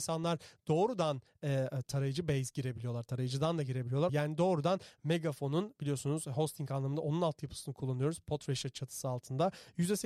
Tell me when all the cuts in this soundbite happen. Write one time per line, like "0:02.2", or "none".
0:04.1